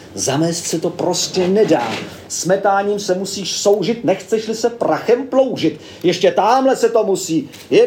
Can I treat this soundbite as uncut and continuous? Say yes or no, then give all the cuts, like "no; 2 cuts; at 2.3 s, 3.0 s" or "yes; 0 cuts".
no; 1 cut; at 2.2 s